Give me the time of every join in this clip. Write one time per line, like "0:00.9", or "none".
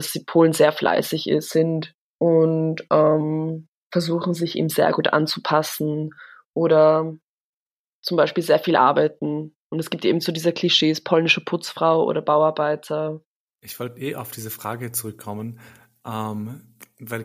0:02.0
0:13.5